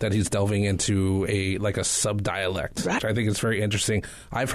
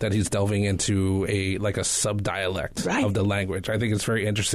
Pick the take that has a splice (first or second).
first